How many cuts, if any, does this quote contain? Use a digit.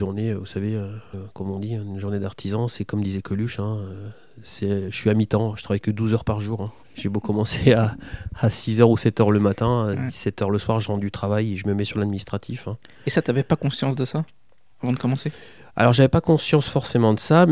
2